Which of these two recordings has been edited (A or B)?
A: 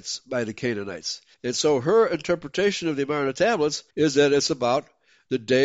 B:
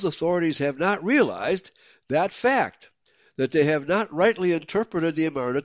A